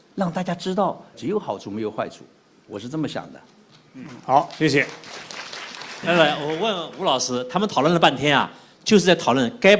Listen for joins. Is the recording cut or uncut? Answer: cut